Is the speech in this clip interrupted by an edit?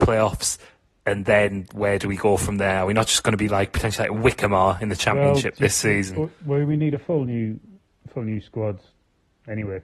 no; 0 cuts

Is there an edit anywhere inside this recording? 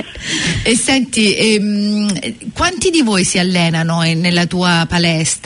no; 0 cuts

